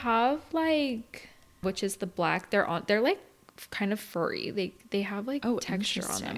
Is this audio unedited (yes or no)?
no